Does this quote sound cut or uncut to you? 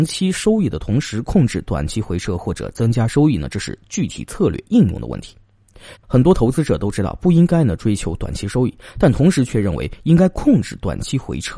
cut